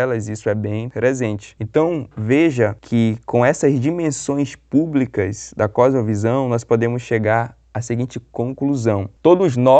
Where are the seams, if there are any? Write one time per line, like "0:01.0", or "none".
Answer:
0:01.6